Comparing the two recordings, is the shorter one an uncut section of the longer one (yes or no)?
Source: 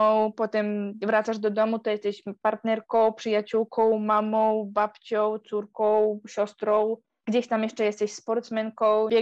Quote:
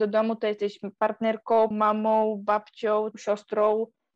no